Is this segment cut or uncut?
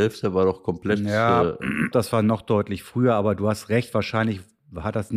cut